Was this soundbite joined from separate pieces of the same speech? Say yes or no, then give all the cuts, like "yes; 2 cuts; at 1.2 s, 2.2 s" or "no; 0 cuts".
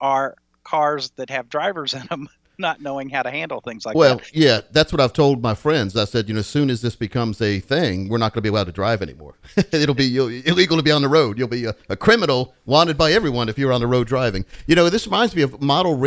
no; 0 cuts